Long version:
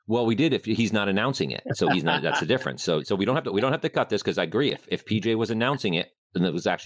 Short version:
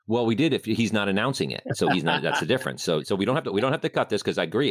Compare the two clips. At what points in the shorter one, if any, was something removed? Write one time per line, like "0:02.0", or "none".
none